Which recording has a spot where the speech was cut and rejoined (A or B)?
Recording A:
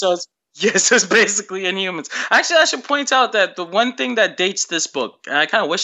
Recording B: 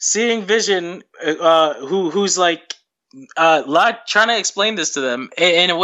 B